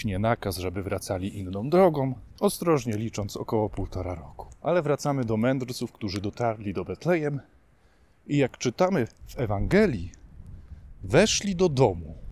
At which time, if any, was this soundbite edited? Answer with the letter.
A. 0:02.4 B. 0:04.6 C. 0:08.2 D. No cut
A